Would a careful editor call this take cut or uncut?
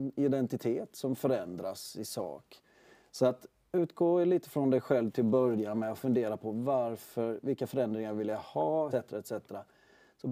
cut